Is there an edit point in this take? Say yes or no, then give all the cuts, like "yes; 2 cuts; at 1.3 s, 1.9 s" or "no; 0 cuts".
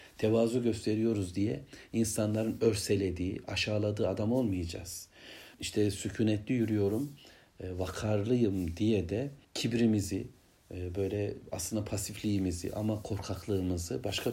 yes; 2 cuts; at 5.5 s, 9.4 s